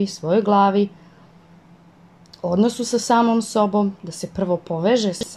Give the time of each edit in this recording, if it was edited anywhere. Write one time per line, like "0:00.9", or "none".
none